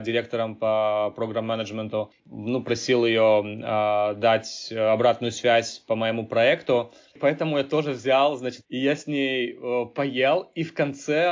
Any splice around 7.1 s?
yes; 2 cuts; at 7.1 s, 8.6 s

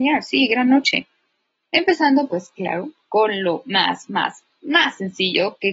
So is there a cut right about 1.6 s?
yes; 1 cut; at 1.6 s

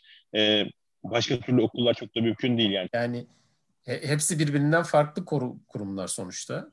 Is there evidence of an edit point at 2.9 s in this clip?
yes; 1 cut; at 2.9 s

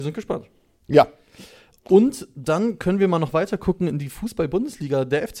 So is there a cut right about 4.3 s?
no; 0 cuts

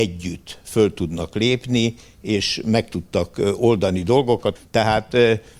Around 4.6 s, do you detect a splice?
yes; 1 cut; at 4.6 s

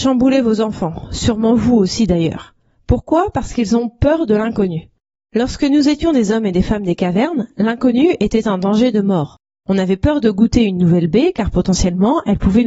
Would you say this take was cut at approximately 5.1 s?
yes; 1 cut; at 5.1 s

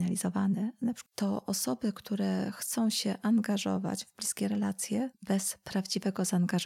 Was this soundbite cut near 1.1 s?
yes; 1 cut; at 1.1 s

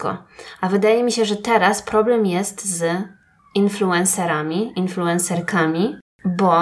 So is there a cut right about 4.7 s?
no; 0 cuts

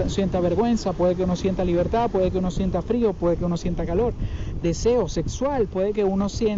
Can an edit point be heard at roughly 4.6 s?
yes; 1 cut; at 4.6 s

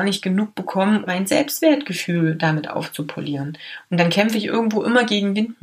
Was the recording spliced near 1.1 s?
yes; 1 cut; at 1.1 s

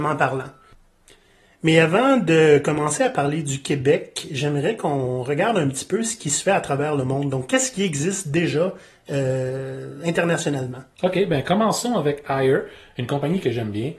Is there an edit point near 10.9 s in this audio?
yes; 1 cut; at 10.9 s

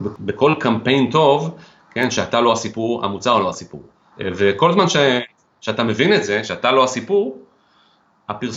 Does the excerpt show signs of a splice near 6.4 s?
no; 1 cut; at 4.1 s

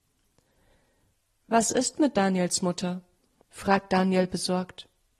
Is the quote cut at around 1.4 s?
no; 1 cut; at 3.4 s

